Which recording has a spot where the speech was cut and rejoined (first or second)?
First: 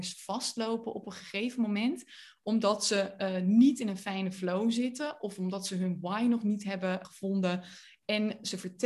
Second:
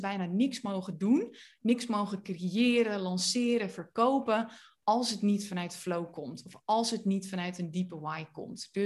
first